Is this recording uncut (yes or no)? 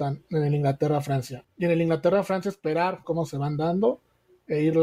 no